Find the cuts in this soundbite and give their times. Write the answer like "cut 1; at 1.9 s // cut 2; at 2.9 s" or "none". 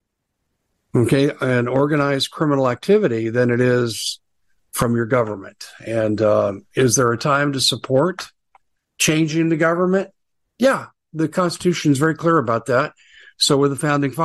none